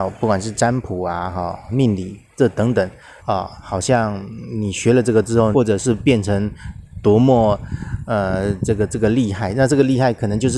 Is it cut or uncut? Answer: cut